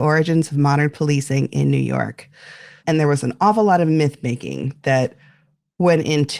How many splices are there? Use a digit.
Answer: 1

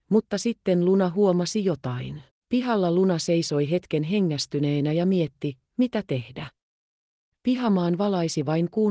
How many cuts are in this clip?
1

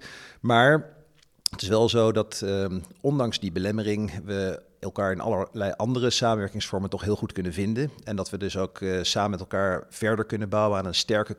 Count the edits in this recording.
0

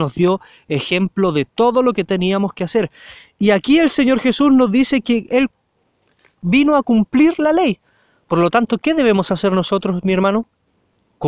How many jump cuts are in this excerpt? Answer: 0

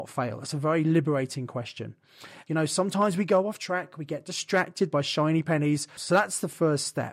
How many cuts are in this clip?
2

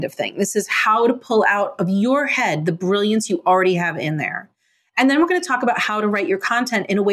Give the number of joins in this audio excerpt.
0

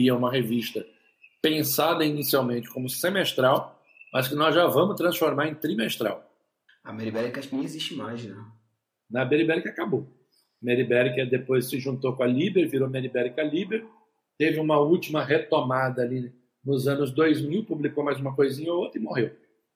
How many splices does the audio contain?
1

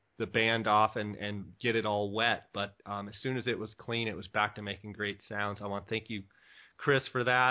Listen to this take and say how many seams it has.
0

